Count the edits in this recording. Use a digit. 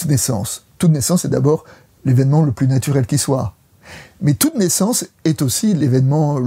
0